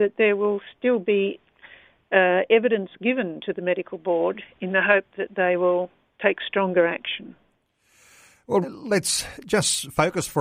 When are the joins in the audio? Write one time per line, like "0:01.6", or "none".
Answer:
0:08.6

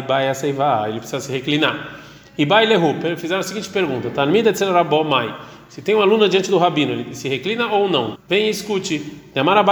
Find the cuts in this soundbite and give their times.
0:08.1

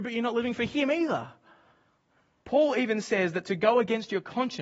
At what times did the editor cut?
0:02.4

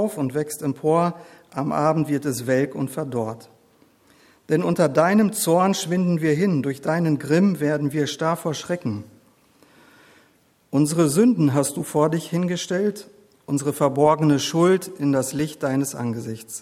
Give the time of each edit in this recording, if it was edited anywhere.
none

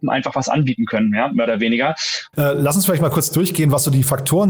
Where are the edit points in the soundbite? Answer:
0:02.3

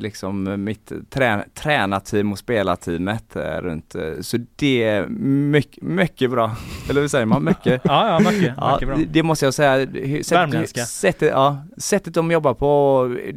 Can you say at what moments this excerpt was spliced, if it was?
none

